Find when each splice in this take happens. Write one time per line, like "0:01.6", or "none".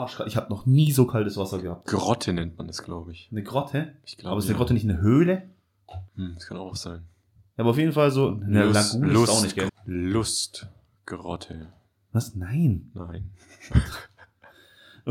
0:06.1
0:09.7